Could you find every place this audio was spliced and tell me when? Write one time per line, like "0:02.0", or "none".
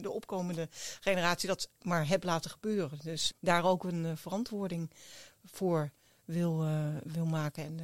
0:03.3